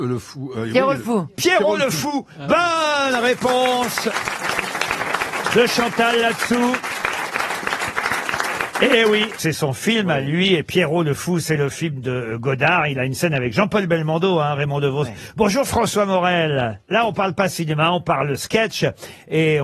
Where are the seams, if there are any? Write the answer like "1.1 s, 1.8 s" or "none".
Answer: 9.4 s, 16.8 s